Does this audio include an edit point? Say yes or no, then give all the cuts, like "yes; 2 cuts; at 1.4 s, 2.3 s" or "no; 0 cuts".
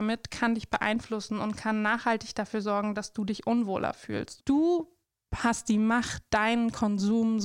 yes; 1 cut; at 4.4 s